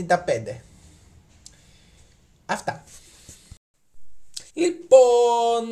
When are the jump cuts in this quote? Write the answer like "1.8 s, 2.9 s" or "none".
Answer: 4.5 s